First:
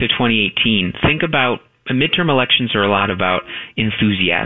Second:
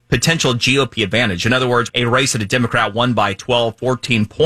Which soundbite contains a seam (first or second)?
second